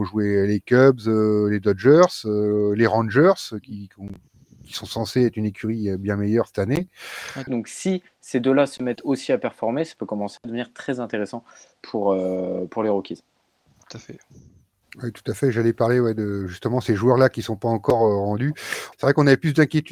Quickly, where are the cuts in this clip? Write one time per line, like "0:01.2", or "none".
0:07.5
0:18.9